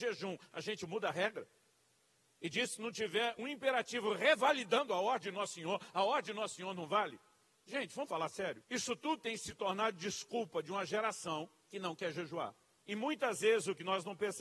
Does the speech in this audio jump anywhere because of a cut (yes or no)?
yes